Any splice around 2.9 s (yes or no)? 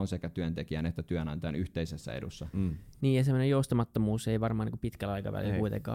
no